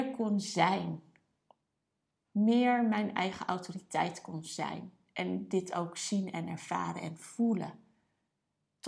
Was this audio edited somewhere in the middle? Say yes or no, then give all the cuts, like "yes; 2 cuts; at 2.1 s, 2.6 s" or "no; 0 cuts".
no; 0 cuts